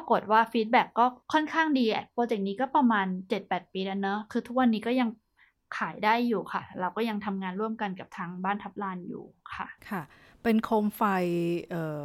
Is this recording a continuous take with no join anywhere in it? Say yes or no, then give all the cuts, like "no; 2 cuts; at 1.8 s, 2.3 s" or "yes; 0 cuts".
no; 2 cuts; at 1.2 s, 9.8 s